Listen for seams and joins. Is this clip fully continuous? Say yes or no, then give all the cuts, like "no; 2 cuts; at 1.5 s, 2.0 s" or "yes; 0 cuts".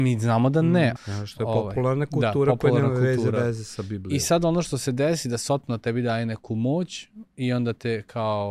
no; 1 cut; at 1.0 s